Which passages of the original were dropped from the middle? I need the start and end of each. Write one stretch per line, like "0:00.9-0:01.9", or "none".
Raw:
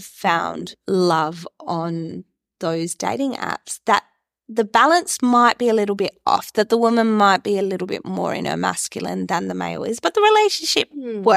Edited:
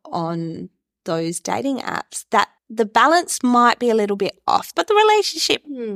0:04.1-0:04.4
0:06.5-0:10.0